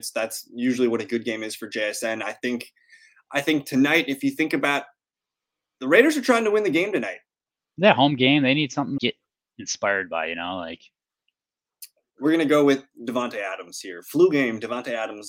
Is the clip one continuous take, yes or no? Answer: no